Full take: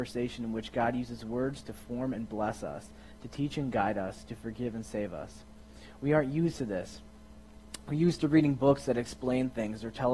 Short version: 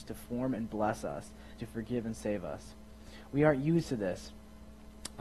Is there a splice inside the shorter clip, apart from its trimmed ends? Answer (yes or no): yes